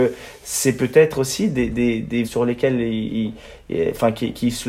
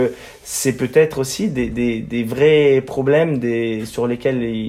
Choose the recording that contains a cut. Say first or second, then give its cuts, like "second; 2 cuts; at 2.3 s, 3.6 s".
first; 1 cut; at 2.2 s